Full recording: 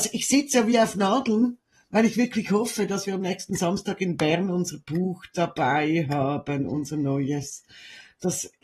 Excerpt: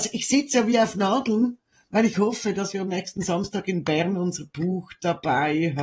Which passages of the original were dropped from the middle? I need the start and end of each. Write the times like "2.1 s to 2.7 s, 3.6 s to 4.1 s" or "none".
2.1 s to 2.5 s